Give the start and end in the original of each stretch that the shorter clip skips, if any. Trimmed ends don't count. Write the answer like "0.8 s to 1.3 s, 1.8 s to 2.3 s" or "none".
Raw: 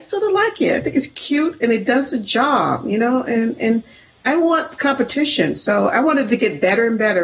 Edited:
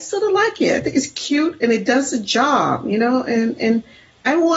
none